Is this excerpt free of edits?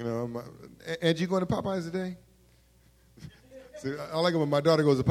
yes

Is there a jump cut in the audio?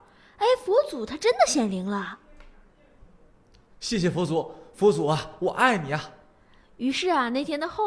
no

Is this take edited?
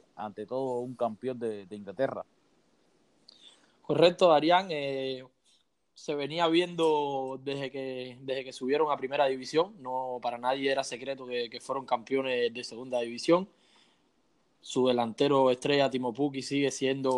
no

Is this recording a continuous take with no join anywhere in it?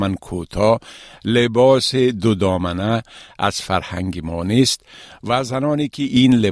yes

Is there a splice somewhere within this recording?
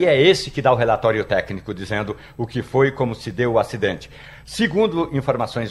no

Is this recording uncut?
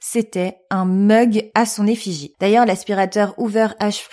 no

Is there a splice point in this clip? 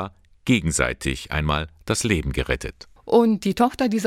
yes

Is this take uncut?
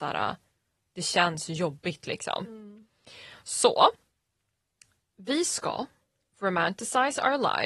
yes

